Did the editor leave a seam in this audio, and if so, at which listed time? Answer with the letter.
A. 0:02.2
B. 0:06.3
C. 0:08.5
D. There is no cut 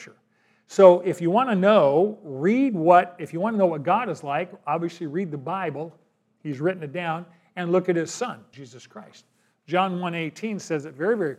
C